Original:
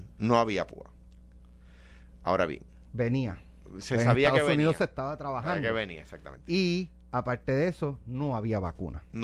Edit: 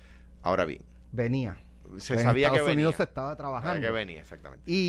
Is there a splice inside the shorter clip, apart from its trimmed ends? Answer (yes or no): no